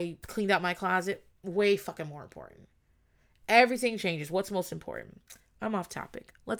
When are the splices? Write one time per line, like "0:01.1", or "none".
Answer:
none